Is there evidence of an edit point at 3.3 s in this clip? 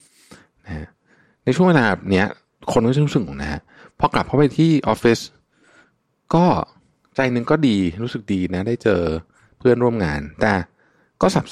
yes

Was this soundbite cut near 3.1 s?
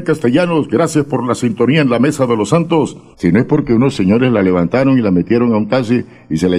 yes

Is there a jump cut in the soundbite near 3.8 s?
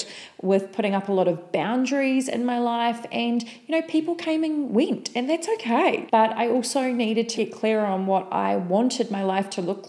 no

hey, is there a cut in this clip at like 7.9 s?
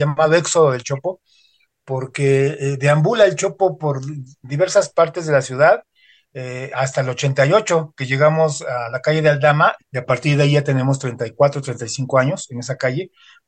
no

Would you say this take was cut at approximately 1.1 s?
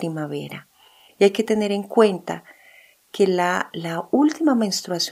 yes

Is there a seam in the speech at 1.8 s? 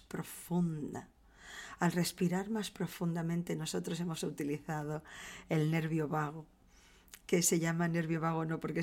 no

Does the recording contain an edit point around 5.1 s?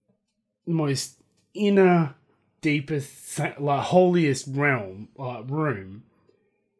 no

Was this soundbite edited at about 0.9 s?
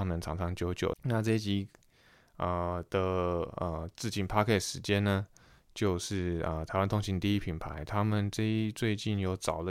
yes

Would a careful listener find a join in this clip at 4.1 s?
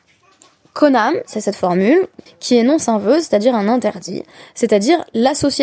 no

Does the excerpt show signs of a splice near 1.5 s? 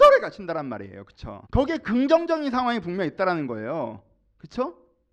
yes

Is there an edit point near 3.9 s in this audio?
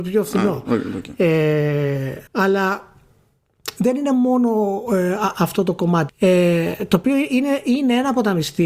no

